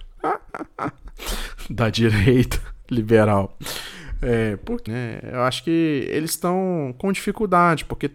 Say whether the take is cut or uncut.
cut